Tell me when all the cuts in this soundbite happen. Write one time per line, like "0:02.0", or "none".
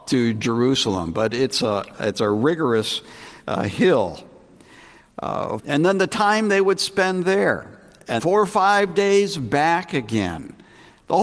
0:05.6
0:08.2